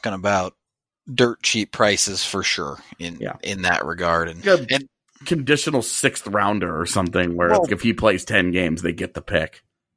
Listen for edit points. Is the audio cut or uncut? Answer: cut